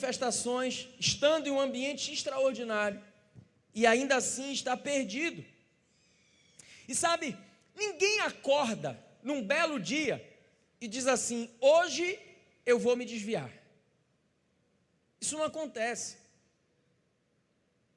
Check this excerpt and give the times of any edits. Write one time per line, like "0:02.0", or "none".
none